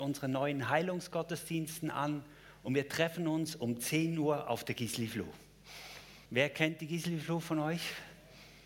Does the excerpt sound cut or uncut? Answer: cut